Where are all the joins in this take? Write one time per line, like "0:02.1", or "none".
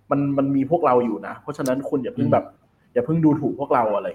none